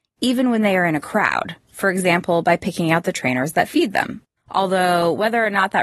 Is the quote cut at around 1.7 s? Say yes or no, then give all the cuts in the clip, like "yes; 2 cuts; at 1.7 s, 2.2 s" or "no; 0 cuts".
no; 1 cut; at 4.4 s